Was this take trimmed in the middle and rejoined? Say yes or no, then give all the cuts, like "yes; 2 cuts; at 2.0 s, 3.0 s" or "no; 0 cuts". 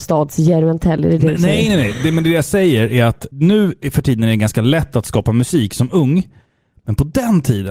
no; 0 cuts